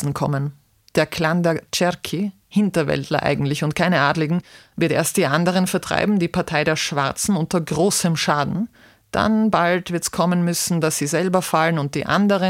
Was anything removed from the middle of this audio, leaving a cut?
no; 0 cuts

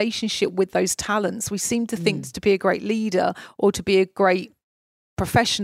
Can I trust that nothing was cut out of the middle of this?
yes; 0 cuts

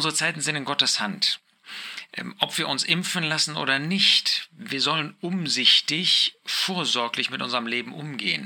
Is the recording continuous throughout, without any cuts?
yes; 0 cuts

